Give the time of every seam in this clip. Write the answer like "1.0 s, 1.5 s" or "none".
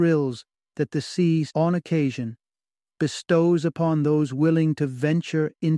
1.5 s